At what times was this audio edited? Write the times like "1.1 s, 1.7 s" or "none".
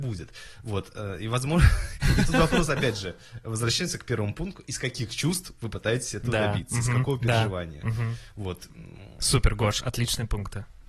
none